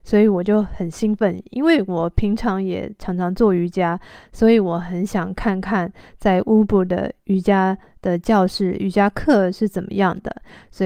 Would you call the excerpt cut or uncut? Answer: uncut